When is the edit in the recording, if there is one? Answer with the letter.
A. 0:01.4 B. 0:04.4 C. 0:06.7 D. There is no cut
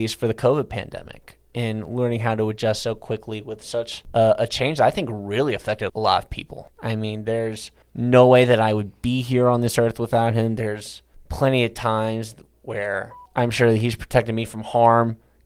C